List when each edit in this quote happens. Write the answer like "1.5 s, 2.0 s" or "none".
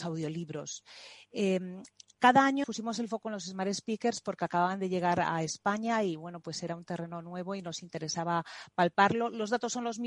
2.6 s